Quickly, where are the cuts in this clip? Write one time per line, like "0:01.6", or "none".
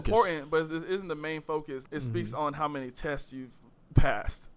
0:01.9